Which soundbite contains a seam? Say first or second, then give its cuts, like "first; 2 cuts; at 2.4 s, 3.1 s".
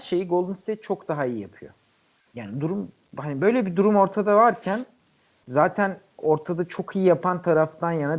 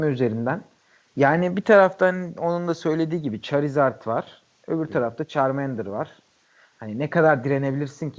first; 1 cut; at 2.2 s